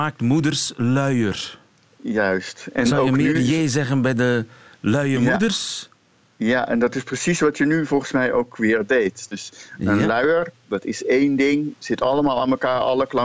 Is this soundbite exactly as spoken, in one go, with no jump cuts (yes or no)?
yes